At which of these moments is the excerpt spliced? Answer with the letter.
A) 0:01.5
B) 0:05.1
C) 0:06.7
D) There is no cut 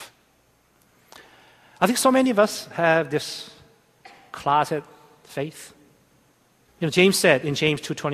C